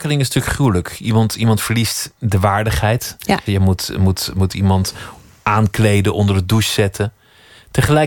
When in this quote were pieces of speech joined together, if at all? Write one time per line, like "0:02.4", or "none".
0:03.5